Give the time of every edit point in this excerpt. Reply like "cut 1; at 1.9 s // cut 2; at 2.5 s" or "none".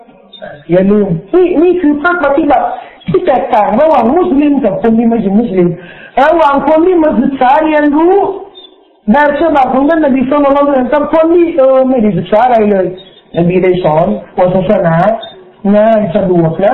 none